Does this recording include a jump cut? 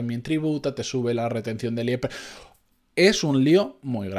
no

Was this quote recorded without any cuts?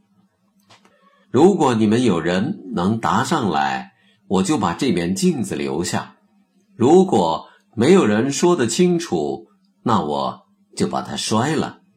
no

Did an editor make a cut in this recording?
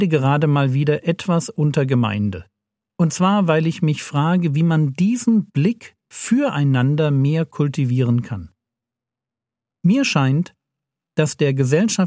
no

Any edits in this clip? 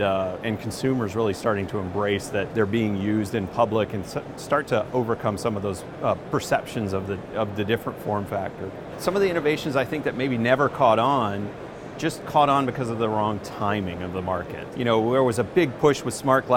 yes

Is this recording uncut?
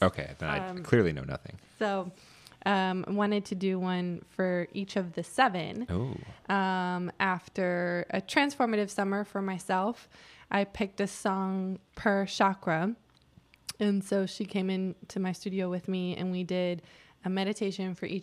yes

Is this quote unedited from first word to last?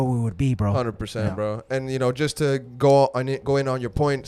yes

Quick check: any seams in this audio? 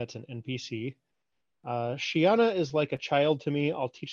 no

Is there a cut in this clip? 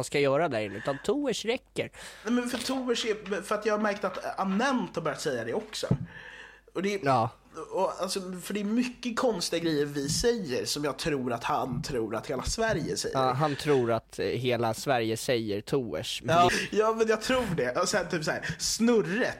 yes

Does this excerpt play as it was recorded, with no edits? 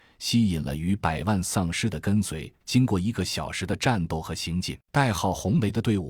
no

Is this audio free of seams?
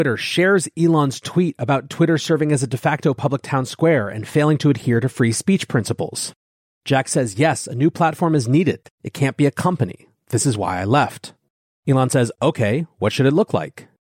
yes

